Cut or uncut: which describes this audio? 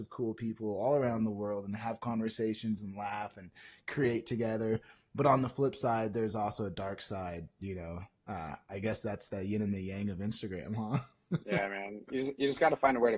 uncut